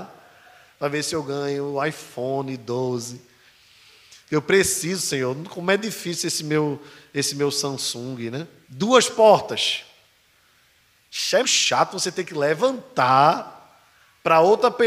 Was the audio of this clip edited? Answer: yes; 2 cuts; at 8.6 s, 11.4 s

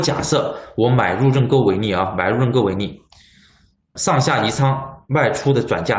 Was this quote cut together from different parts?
yes; 1 cut; at 4.0 s

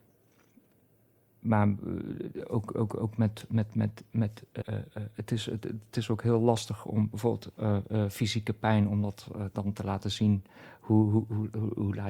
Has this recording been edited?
yes; 1 cut; at 4.6 s

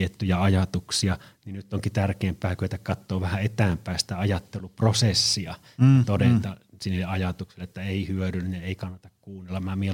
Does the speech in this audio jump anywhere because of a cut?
no; 0 cuts

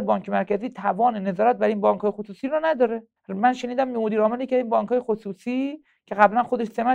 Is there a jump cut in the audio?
yes; 1 cut; at 3.2 s

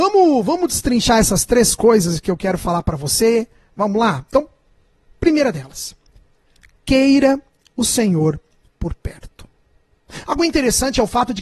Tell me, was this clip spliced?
no; 0 cuts

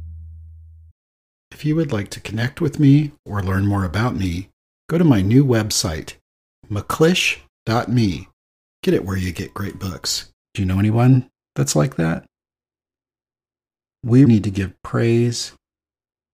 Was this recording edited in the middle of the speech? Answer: yes; 3 cuts; at 8.7 s, 10.4 s, 14.3 s

